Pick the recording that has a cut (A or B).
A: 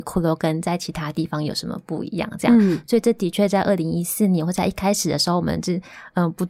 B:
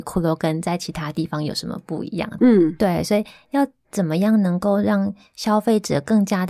B